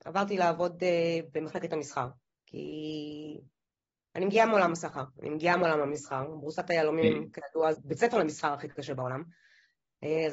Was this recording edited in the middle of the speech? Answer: yes; 1 cut; at 7.7 s

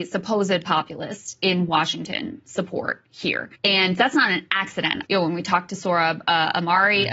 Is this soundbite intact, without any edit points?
no; 2 cuts; at 3.5 s, 5.0 s

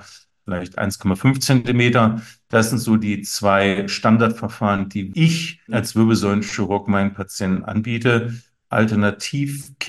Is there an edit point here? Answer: no; 0 cuts

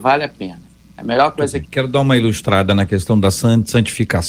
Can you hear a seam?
yes; 1 cut; at 1.6 s

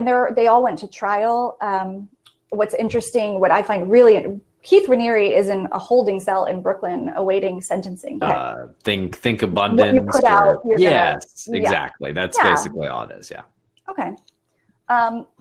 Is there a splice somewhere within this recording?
yes; 1 cut; at 8.2 s

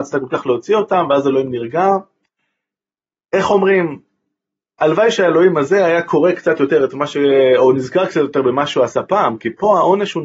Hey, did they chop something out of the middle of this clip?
no; 0 cuts

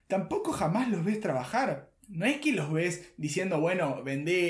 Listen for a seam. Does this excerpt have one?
yes; 1 cut; at 2.0 s

